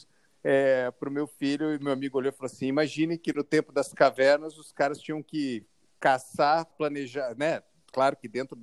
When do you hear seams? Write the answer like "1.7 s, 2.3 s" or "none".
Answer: 6.7 s